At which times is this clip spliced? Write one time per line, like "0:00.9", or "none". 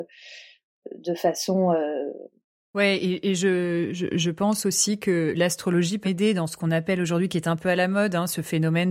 0:02.6
0:06.0